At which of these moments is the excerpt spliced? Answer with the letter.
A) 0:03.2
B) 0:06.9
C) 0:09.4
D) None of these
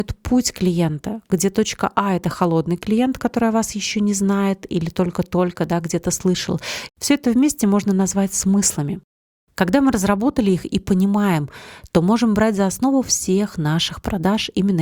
B